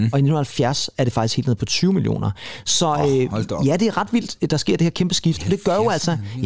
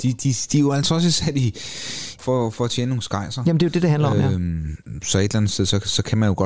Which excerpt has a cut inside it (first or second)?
second